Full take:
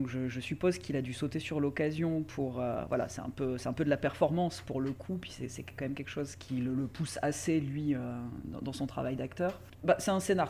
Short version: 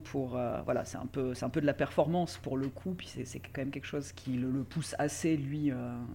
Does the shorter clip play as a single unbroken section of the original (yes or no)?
yes